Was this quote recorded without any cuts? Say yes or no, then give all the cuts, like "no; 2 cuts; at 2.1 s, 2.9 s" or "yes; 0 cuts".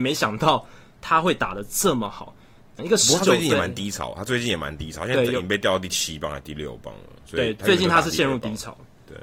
no; 1 cut; at 2.8 s